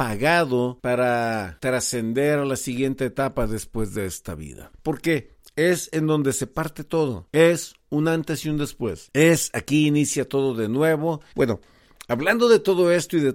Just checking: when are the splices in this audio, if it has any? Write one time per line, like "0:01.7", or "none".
0:04.7
0:11.3